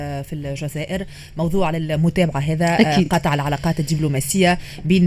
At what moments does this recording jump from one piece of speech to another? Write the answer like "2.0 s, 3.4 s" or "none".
none